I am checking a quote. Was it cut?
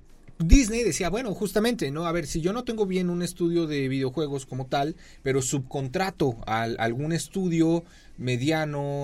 no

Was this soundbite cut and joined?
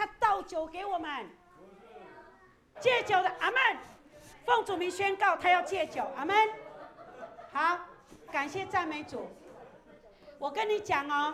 yes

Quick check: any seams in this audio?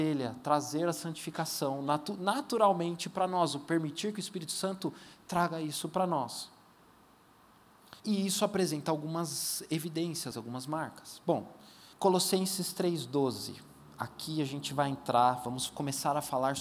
yes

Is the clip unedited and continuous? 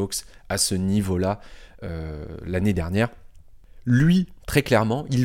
yes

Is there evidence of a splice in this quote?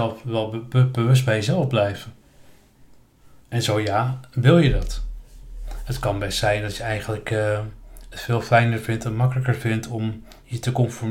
no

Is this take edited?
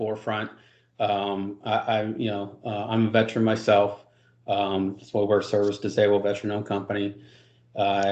no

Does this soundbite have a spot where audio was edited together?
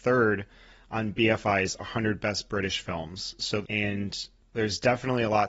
yes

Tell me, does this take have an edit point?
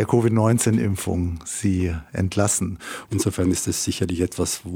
yes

